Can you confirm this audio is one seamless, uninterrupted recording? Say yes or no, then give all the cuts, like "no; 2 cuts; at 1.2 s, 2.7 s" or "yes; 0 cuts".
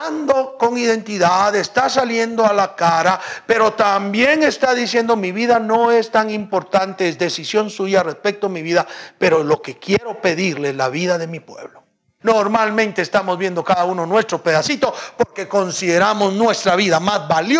no; 1 cut; at 12.2 s